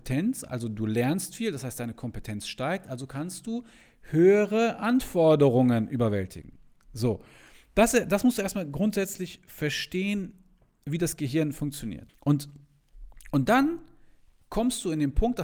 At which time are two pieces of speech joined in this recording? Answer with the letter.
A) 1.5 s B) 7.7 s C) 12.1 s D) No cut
C